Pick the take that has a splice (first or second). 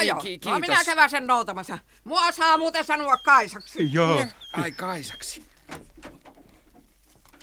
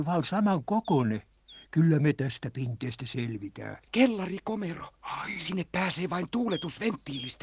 second